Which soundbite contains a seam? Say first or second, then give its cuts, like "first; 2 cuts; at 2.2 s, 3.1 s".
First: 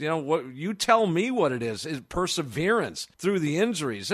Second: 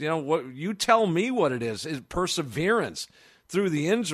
first; 1 cut; at 3.1 s